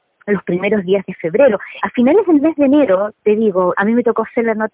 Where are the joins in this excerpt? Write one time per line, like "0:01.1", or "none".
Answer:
0:01.8
0:03.7

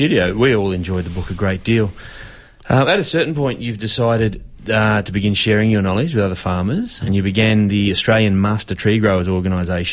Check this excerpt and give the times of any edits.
none

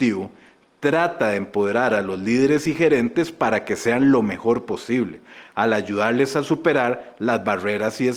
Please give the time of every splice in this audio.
none

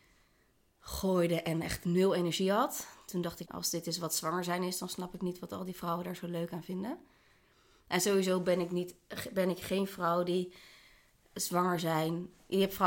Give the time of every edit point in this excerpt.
0:03.4

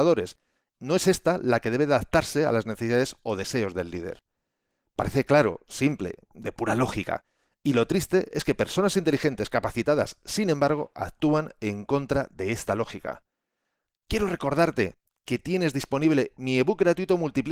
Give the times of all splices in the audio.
none

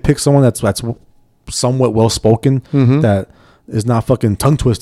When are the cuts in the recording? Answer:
none

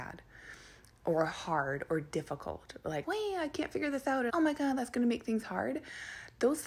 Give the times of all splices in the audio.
0:03.0
0:04.3

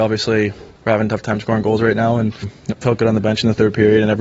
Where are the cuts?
0:02.7

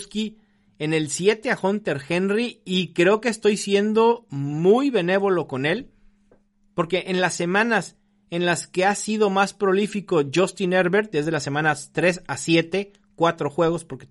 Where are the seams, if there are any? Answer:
none

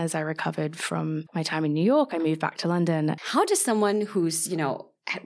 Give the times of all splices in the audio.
0:03.2

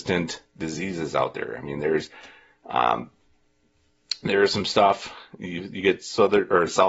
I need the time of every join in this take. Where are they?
none

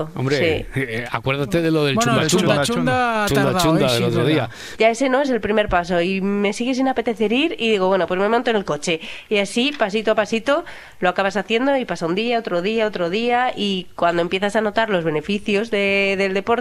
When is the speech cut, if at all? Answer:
0:04.8

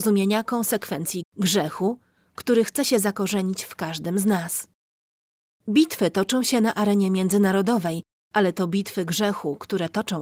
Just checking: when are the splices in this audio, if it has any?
0:01.2

